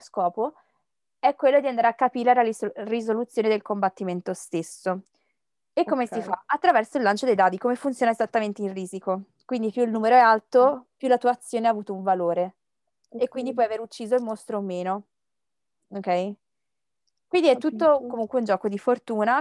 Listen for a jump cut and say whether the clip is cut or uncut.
uncut